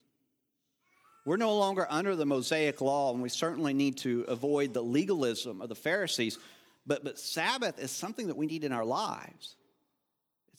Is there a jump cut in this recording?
no; 0 cuts

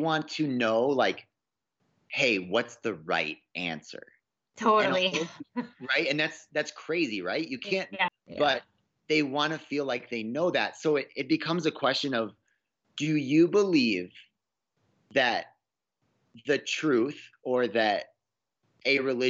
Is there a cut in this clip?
yes; 1 cut; at 8.1 s

